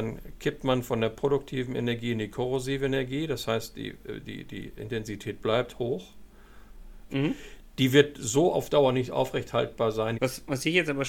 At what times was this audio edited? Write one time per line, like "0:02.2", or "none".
0:07.1
0:10.1